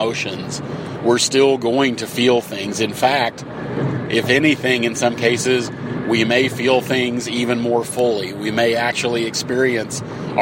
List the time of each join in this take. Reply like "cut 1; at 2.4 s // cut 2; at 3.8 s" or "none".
none